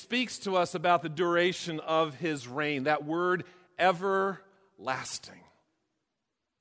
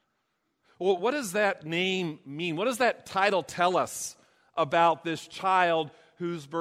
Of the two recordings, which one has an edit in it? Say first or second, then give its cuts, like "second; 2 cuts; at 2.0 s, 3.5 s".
second; 1 cut; at 1.0 s